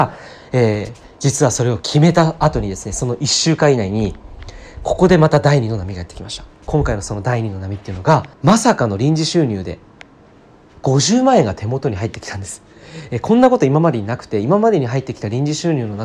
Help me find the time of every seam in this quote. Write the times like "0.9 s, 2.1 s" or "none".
8.3 s